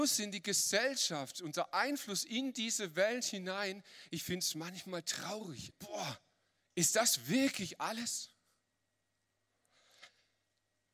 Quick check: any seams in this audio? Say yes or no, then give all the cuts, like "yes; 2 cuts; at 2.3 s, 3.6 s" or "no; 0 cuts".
yes; 1 cut; at 5.7 s